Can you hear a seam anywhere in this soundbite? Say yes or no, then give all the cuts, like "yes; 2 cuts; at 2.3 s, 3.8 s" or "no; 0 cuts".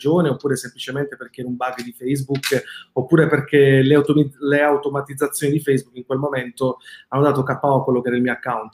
no; 0 cuts